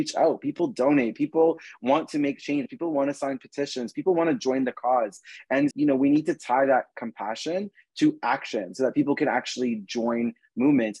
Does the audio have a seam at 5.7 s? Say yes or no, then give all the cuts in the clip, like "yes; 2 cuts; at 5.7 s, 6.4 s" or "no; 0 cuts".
yes; 1 cut; at 5.7 s